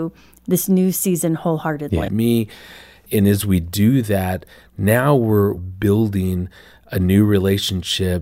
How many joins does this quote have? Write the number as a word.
one